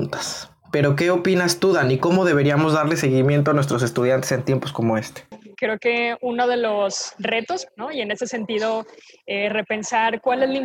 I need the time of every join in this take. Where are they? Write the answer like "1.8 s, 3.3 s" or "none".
5.5 s, 7.7 s

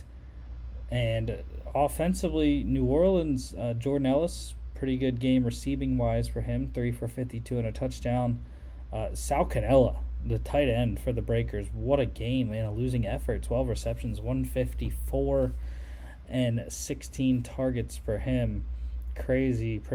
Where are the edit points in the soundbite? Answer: none

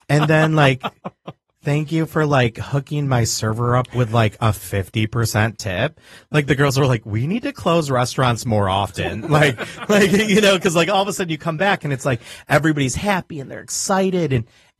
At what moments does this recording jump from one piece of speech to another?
none

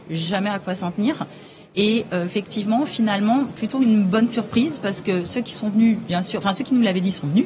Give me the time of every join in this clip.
none

